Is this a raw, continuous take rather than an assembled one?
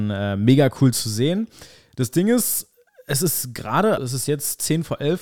no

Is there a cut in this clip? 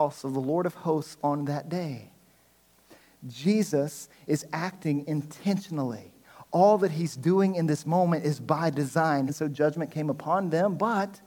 yes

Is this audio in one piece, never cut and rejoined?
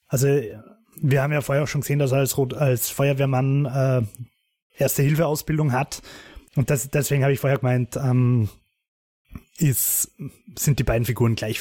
no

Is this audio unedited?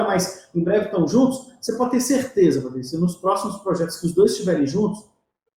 yes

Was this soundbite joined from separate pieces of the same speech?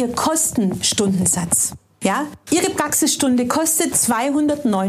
yes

